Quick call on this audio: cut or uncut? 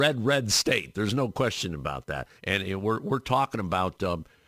cut